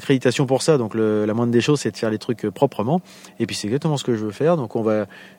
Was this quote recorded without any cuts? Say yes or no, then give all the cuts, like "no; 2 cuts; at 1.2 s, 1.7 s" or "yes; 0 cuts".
yes; 0 cuts